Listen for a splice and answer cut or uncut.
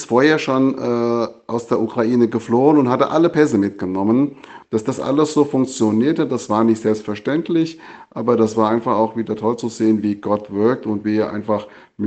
cut